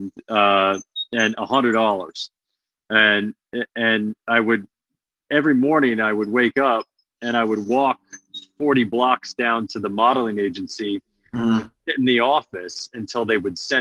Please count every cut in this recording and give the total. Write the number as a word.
zero